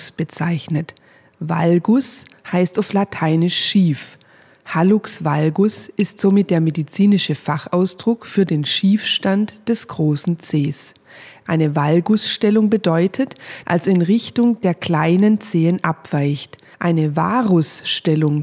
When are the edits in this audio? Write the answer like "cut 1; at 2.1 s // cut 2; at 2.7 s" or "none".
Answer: cut 1; at 13.6 s